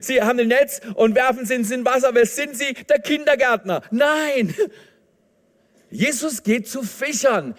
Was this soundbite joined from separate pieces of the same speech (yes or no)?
no